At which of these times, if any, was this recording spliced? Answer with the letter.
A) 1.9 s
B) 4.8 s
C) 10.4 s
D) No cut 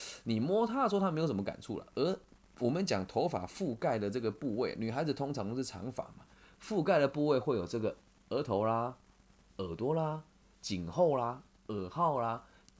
D